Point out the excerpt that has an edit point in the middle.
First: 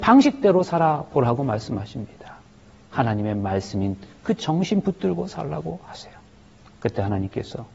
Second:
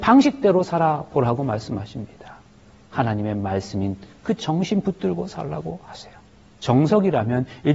second; 1 cut; at 6.6 s

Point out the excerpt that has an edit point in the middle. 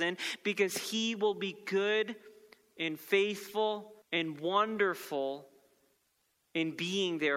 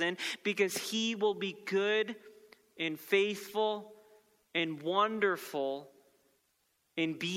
first; 1 cut; at 4.0 s

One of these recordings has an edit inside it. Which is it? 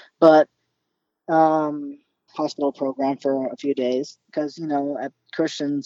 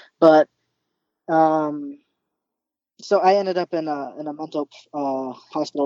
first; 2 cuts; at 2.3 s, 4.2 s

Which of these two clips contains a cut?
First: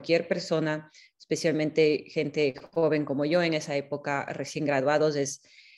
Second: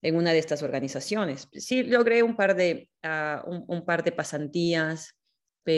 second; 1 cut; at 1.5 s

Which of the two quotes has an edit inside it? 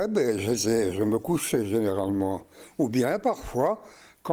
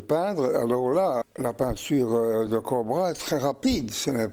second; 2 cuts; at 1.2 s, 2.5 s

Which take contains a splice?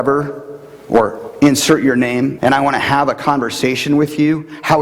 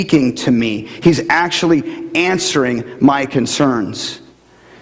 first; 1 cut; at 2.4 s

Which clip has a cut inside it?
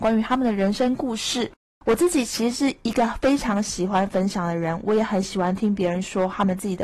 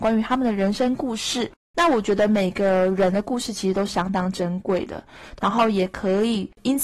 second; 2 cuts; at 1.6 s, 5.4 s

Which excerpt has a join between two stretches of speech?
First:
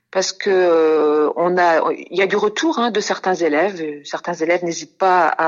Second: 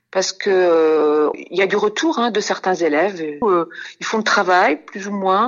second; 2 cuts; at 1.3 s, 3.4 s

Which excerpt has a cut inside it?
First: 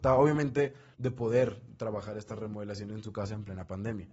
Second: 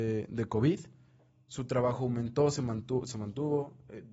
first; 1 cut; at 0.9 s

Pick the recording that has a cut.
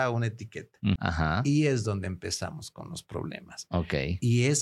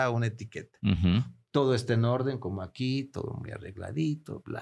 first; 1 cut; at 1.0 s

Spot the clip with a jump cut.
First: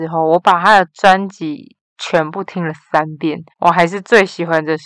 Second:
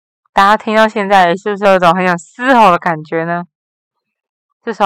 first; 1 cut; at 3.5 s

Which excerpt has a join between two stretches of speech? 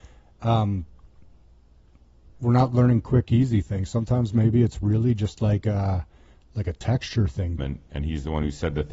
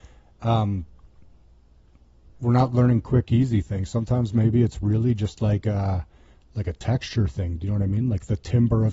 first; 1 cut; at 7.6 s

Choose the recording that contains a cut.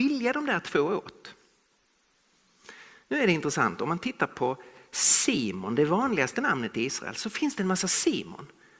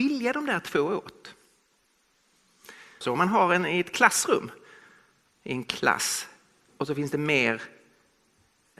second; 1 cut; at 3.0 s

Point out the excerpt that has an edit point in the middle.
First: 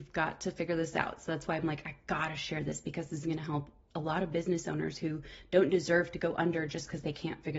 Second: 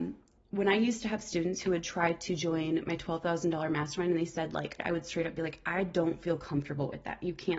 second; 1 cut; at 4.8 s

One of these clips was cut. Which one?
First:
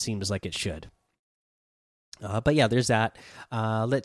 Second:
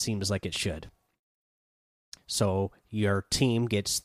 second; 1 cut; at 2.2 s

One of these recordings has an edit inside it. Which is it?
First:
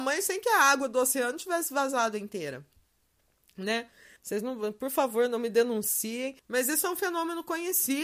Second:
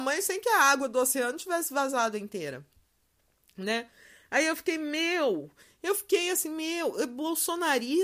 first; 2 cuts; at 4.2 s, 6.4 s

